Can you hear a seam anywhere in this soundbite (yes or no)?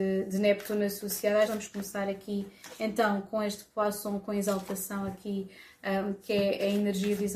yes